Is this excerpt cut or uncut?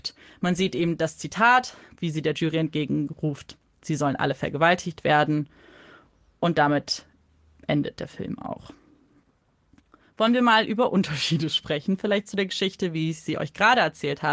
uncut